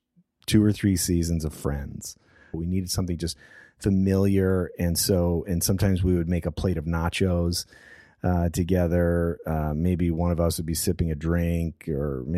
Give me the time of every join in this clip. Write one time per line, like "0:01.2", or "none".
0:02.5